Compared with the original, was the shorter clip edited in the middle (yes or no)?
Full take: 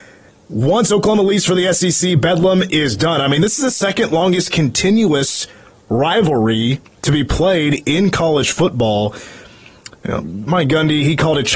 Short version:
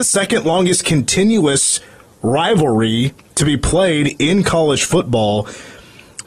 no